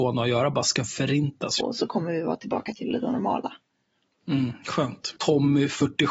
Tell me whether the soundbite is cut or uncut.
cut